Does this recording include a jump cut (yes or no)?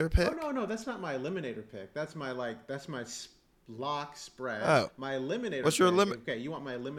no